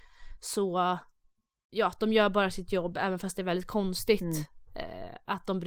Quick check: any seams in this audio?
no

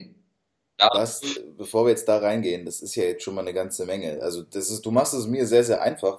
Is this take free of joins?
yes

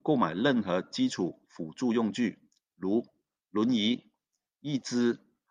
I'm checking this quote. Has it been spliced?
no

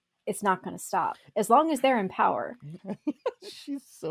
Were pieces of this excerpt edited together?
yes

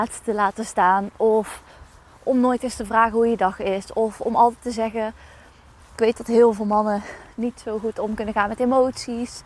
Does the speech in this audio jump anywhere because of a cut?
no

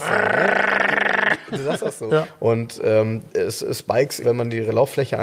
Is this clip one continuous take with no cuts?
no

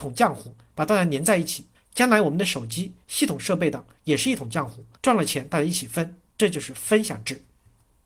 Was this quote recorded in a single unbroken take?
no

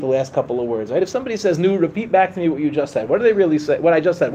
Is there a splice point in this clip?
no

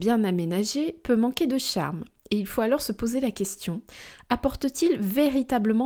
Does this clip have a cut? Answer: no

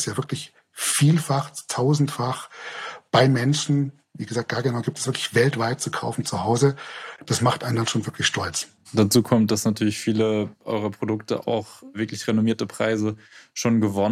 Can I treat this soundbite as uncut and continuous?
yes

